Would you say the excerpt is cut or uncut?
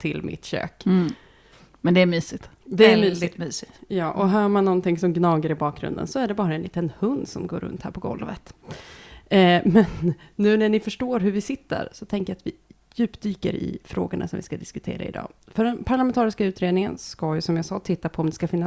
uncut